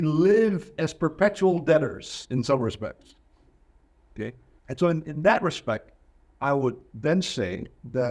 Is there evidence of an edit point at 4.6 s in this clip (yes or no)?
yes